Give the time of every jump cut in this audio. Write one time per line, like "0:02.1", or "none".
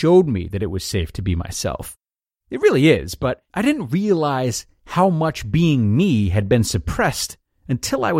0:02.4
0:03.5